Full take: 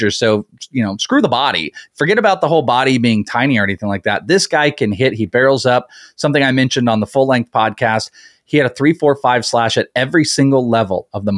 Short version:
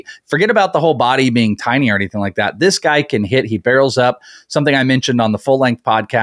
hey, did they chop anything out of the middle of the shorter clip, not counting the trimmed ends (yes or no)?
no